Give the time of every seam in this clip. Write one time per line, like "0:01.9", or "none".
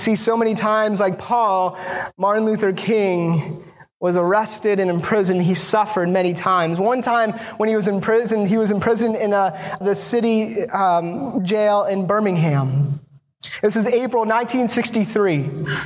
0:09.8